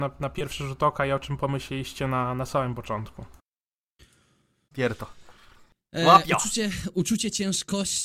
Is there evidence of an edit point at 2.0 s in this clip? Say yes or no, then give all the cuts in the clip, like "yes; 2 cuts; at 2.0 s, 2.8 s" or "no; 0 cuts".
no; 1 cut; at 4.7 s